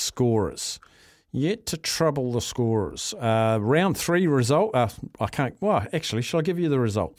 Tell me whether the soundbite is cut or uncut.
uncut